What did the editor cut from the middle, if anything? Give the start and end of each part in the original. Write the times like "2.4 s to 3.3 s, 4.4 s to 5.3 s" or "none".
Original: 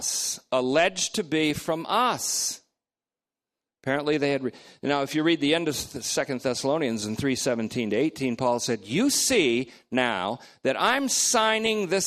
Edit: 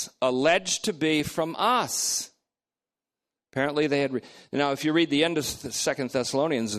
none